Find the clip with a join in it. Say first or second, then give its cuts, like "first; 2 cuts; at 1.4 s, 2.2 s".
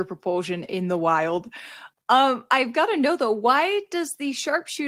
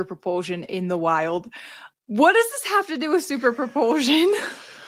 second; 1 cut; at 2.0 s